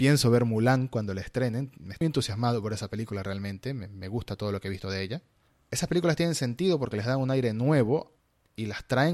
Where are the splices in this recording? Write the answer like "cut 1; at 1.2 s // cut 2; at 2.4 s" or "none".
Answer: cut 1; at 2.0 s